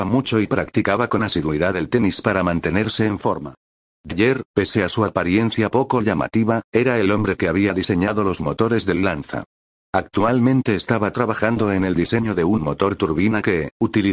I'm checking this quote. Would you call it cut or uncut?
uncut